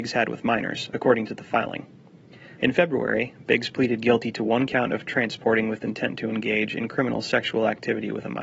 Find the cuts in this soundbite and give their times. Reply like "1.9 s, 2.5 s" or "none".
2.6 s